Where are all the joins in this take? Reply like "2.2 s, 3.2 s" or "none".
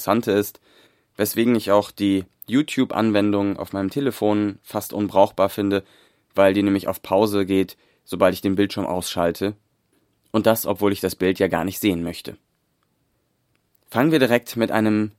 none